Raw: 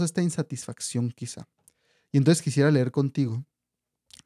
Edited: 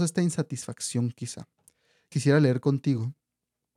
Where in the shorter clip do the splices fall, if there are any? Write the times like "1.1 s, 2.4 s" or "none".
2.1 s